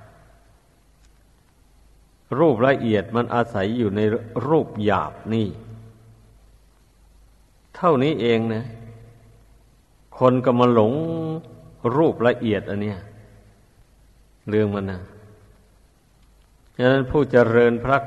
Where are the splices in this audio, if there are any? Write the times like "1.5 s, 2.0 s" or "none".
none